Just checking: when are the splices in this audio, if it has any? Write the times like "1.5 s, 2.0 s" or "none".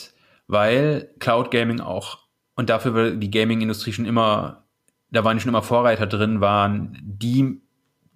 none